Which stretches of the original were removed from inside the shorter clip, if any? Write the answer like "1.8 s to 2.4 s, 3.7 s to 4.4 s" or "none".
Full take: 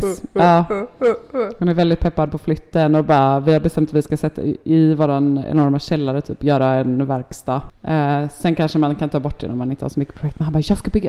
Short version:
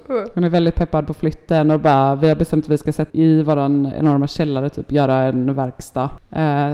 4.3 s to 4.6 s